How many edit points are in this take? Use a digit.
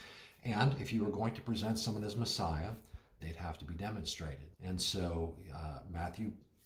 2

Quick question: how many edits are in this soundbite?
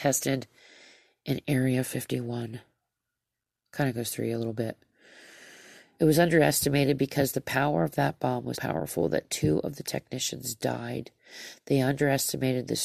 1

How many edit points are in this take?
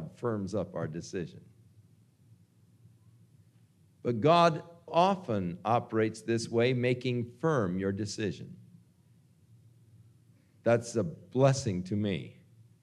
1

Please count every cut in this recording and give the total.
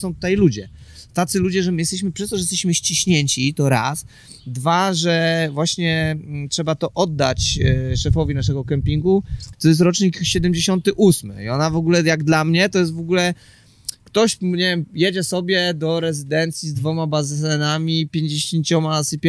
1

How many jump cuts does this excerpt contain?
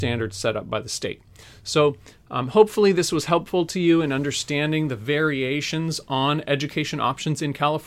0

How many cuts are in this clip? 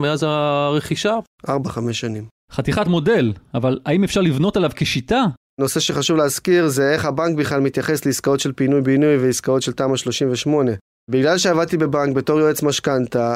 1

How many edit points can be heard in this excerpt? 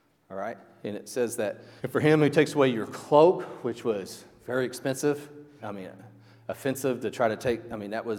2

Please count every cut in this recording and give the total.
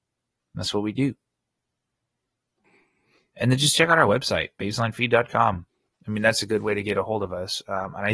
1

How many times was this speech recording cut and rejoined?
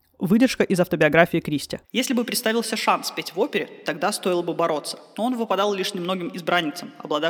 1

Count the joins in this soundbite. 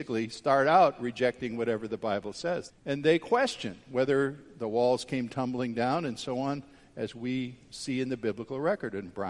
1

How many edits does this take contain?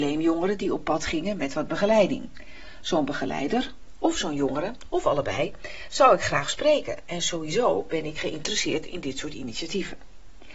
0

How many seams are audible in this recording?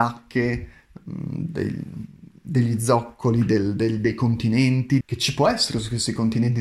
1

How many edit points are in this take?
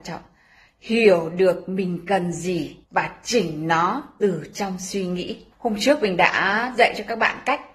2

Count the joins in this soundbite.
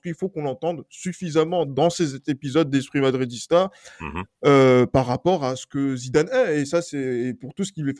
0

